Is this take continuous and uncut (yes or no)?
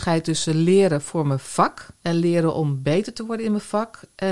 no